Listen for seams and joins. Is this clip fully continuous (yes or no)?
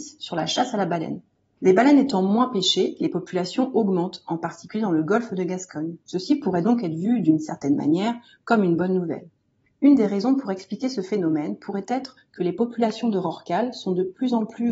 no